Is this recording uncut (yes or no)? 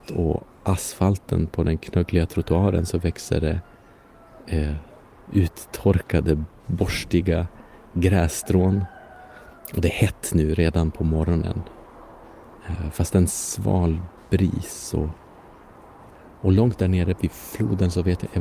yes